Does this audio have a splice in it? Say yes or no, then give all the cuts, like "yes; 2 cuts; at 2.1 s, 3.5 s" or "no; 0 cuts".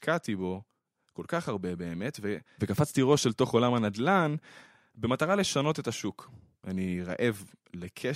yes; 1 cut; at 6.6 s